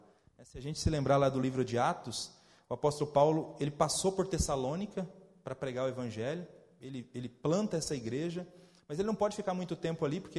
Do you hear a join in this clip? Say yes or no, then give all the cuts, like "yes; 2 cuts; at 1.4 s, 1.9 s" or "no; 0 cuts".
no; 0 cuts